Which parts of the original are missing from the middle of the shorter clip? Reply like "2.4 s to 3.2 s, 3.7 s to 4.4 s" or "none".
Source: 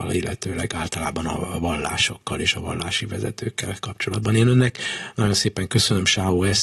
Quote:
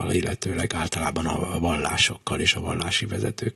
none